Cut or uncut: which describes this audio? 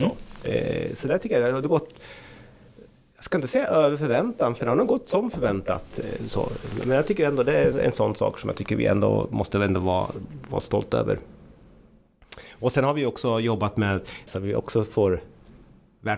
cut